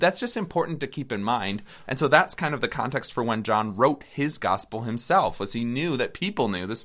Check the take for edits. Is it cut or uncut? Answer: cut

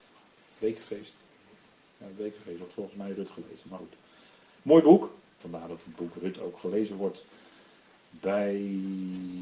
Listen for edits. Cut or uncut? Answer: cut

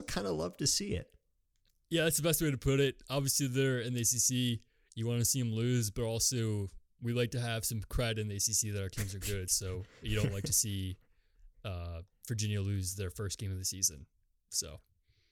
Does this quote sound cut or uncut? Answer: uncut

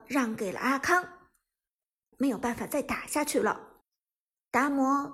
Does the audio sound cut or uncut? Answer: cut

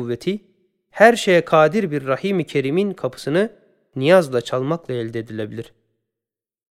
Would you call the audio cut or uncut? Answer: uncut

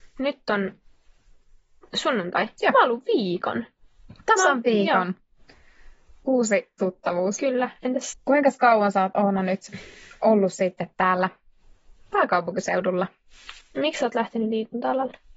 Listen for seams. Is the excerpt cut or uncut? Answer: cut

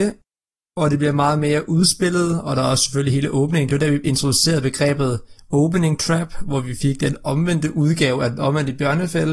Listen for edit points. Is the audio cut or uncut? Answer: uncut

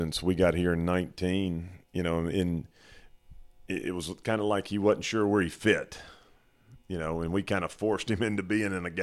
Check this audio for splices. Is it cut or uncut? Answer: uncut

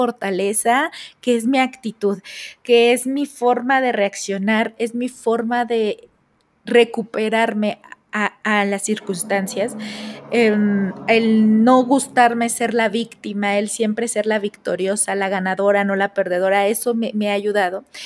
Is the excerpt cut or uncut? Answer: uncut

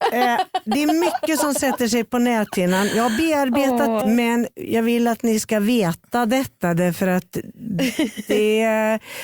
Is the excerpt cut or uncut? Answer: cut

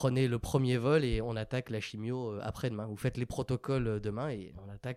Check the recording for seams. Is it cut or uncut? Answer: uncut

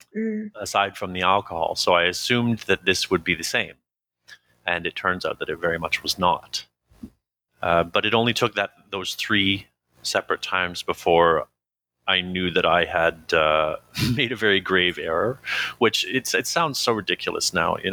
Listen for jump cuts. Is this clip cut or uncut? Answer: cut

